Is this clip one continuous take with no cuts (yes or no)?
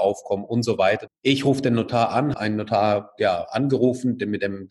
no